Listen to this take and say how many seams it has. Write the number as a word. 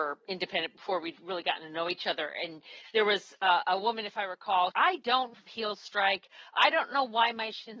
one